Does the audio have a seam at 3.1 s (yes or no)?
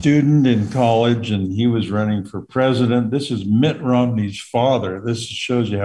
no